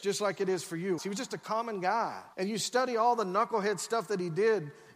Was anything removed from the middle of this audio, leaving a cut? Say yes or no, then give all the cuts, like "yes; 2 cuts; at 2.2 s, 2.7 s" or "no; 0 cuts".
yes; 2 cuts; at 1.0 s, 2.3 s